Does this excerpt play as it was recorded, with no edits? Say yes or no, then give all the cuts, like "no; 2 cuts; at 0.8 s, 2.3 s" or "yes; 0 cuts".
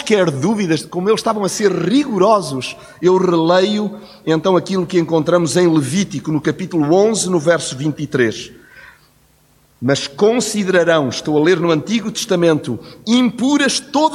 yes; 0 cuts